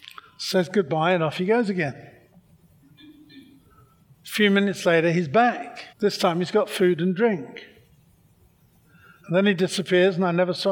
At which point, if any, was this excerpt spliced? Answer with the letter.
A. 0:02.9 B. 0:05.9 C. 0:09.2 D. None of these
B